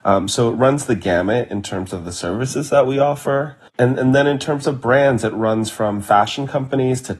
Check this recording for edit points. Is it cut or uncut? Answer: cut